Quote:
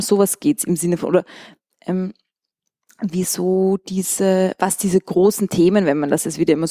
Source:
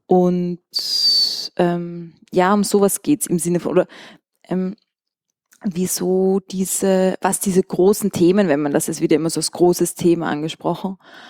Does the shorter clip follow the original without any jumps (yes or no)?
yes